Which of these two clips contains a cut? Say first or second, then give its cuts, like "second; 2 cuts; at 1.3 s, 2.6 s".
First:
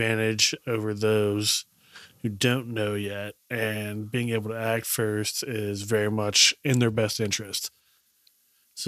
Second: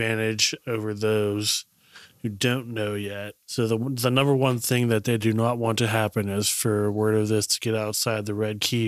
second; 1 cut; at 3.4 s